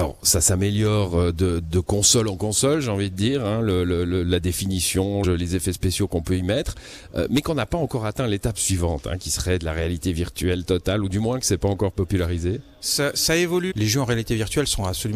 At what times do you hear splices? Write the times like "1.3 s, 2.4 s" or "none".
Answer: 5.2 s, 13.7 s